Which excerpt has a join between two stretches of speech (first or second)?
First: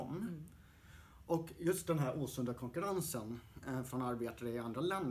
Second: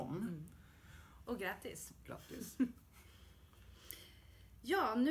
second